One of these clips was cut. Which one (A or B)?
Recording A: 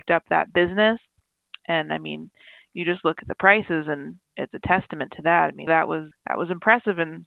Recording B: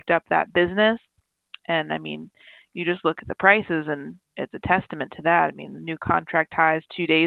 A